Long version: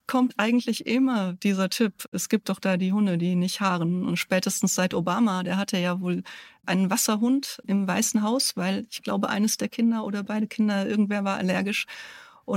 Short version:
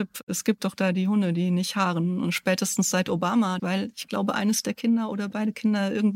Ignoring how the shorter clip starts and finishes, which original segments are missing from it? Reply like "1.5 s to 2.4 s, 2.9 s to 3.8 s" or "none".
5.4 s to 8.5 s